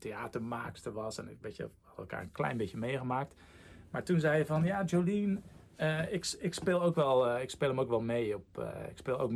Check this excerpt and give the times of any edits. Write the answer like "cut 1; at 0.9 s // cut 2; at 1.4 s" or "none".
none

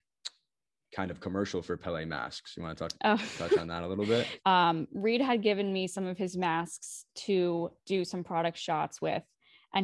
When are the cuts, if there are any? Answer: cut 1; at 4.4 s // cut 2; at 7.8 s

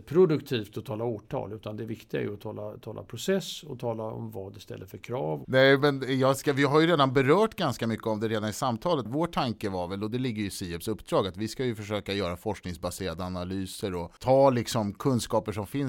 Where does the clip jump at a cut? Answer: cut 1; at 5.4 s // cut 2; at 9.1 s // cut 3; at 14.2 s

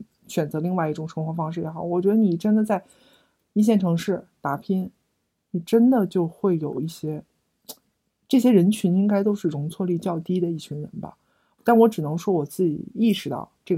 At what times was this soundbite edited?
none

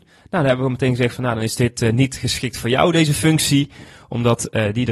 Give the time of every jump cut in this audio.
none

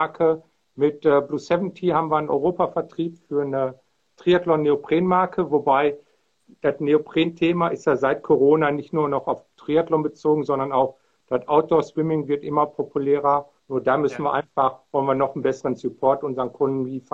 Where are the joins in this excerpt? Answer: cut 1; at 13.6 s

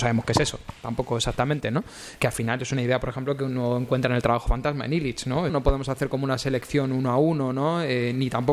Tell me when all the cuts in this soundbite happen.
cut 1; at 2.2 s // cut 2; at 5.5 s

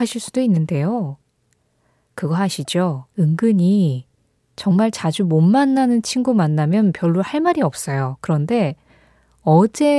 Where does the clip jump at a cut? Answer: cut 1; at 3.1 s

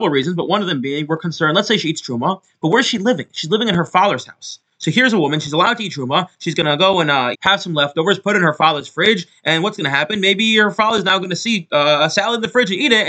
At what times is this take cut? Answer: cut 1; at 7.3 s

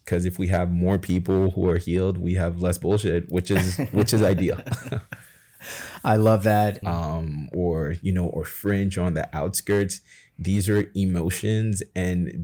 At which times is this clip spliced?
cut 1; at 6.8 s

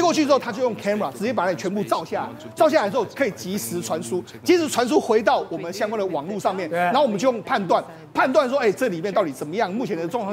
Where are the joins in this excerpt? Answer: cut 1; at 7.4 s

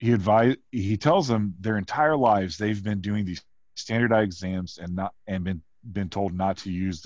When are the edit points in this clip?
none

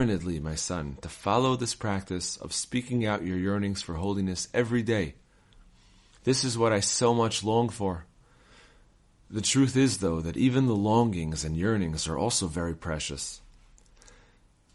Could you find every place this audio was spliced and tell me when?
cut 1; at 6.1 s

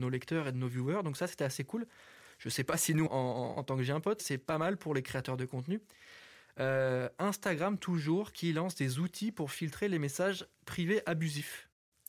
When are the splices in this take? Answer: cut 1; at 3.1 s // cut 2; at 4.2 s

